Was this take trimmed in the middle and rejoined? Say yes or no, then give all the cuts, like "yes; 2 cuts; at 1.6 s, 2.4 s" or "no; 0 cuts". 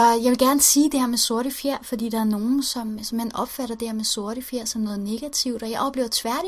no; 0 cuts